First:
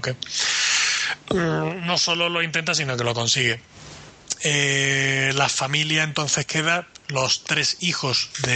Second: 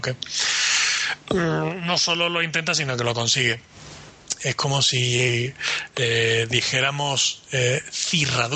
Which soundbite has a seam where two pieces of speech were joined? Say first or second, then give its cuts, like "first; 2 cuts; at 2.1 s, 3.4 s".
second; 1 cut; at 4.4 s